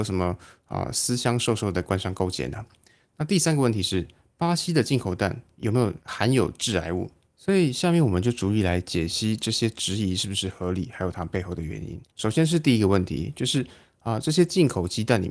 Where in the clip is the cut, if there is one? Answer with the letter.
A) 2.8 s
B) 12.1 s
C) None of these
B